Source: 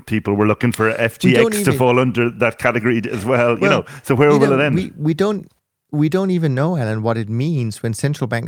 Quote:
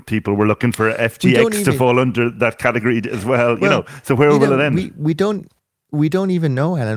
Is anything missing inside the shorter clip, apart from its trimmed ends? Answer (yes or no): no